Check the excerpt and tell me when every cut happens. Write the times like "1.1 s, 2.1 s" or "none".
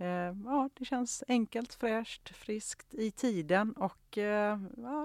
none